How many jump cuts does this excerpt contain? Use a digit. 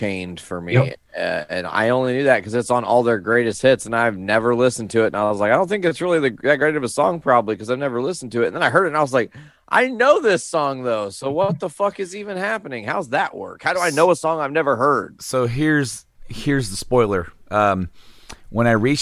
0